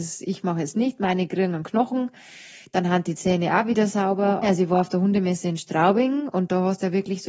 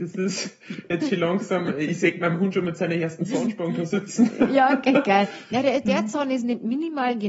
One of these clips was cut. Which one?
first; 1 cut; at 4.4 s

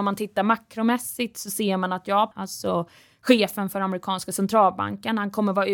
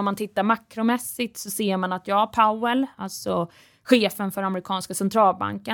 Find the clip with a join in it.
first; 1 cut; at 2.3 s

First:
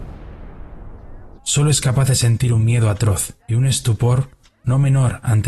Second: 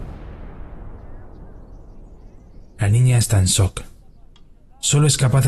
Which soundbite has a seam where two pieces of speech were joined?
first; 2 cuts; at 1.4 s, 3.4 s

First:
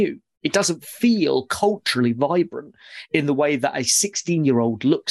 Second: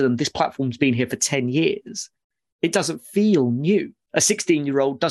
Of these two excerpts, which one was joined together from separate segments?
second; 1 cut; at 4.1 s

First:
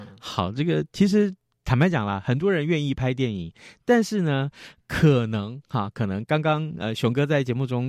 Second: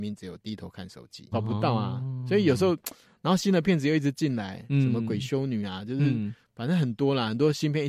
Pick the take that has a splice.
second; 1 cut; at 1.3 s

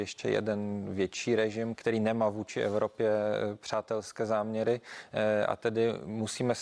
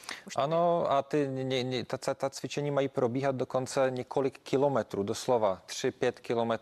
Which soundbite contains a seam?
first; 1 cut; at 1.7 s

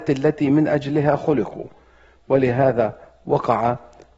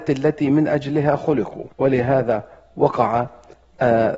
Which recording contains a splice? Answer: second; 1 cut; at 1.7 s

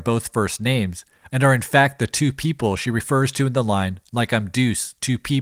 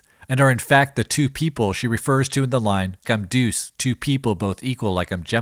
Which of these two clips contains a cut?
second; 1 cut; at 3.0 s

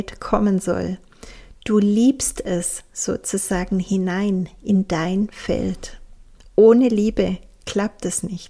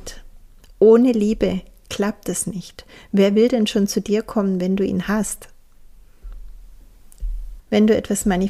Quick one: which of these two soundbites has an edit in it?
second; 1 cut; at 7.6 s

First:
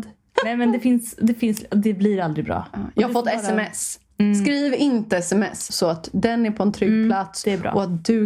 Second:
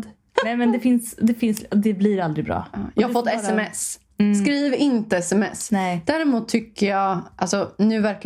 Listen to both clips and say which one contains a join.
first; 1 cut; at 5.7 s

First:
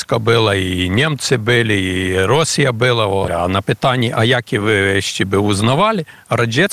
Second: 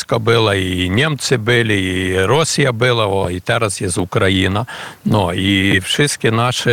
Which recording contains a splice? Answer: first; 1 cut; at 3.3 s

